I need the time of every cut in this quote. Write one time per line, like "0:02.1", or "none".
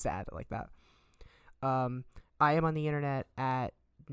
0:02.3